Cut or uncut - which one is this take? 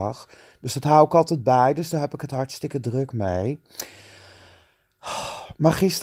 uncut